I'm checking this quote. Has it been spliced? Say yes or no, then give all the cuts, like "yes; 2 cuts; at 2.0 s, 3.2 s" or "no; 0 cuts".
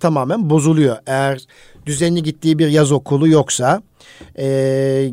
no; 0 cuts